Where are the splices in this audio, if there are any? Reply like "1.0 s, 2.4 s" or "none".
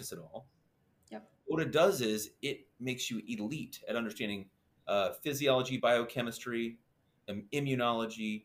none